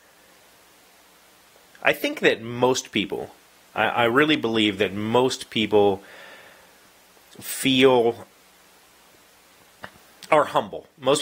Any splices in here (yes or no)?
yes